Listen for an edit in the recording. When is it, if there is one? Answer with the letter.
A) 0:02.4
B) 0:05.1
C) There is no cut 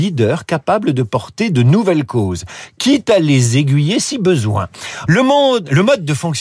B